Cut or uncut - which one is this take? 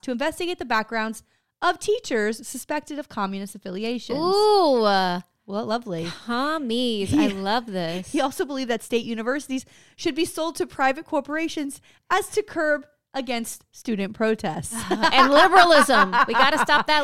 uncut